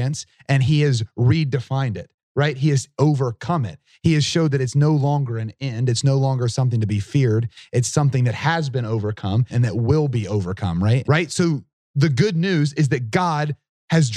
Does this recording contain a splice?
yes; 2 cuts; at 9.5 s, 11.0 s

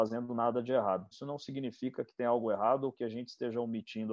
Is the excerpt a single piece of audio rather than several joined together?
no; 1 cut; at 1.1 s

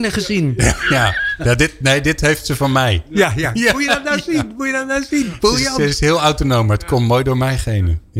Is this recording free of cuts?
yes; 0 cuts

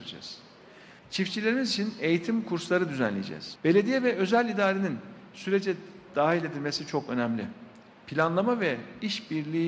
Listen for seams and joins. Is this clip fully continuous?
no; 2 cuts; at 1.0 s, 3.6 s

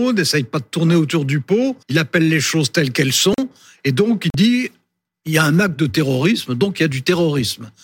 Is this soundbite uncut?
no; 1 cut; at 1.8 s

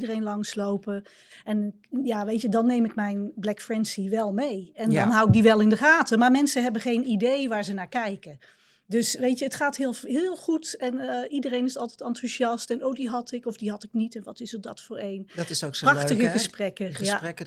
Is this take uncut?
yes; 0 cuts

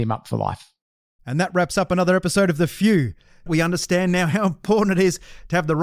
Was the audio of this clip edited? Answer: yes; 2 cuts; at 1.2 s, 3.5 s

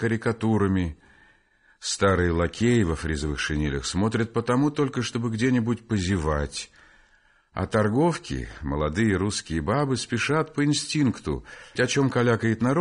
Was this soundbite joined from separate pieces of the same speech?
yes; 1 cut; at 11.8 s

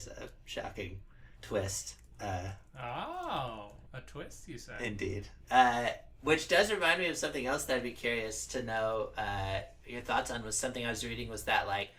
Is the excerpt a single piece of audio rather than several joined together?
yes; 0 cuts

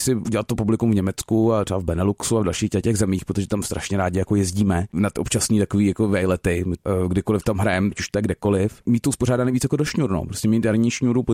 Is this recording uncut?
no; 1 cut; at 7.9 s

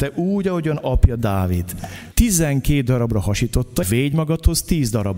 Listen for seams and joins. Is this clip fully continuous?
no; 2 cuts; at 2.1 s, 3.8 s

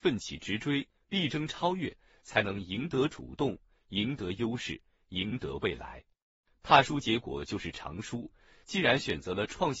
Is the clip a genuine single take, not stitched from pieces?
no; 1 cut; at 6.4 s

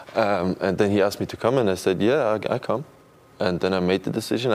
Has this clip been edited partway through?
no; 0 cuts

